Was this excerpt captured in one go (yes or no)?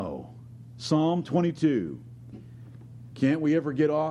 no